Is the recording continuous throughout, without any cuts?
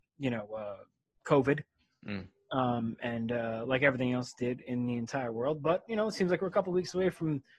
yes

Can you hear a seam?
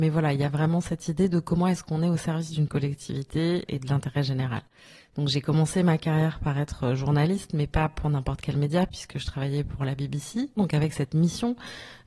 no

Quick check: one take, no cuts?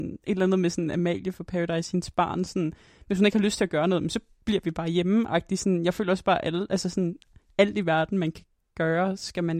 yes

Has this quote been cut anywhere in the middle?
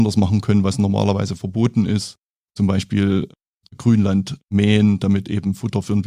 no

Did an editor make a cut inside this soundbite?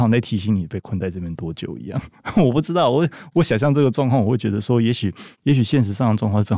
no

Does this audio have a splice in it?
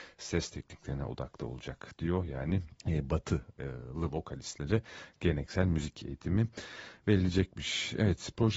yes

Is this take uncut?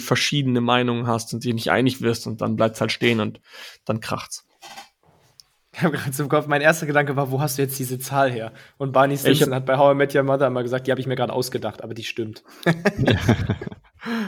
yes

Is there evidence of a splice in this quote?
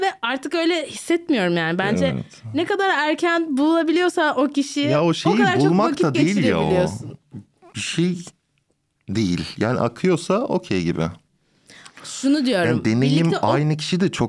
no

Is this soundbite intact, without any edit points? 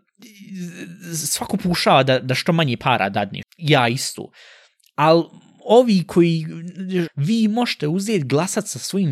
no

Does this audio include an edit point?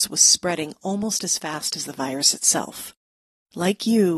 no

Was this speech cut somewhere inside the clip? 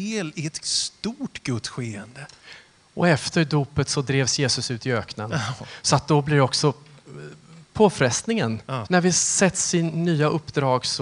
yes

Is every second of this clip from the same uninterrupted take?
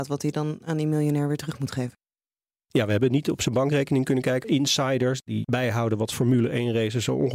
no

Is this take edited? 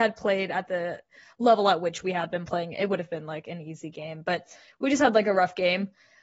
no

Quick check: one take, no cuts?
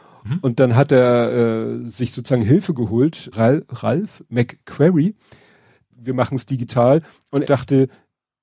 no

